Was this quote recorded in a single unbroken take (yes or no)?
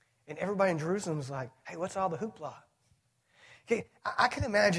yes